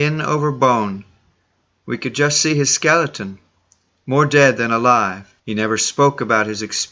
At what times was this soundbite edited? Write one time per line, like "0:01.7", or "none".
0:05.4